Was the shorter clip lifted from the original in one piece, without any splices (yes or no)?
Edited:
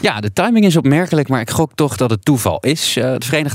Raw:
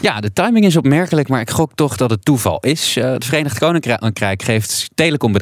yes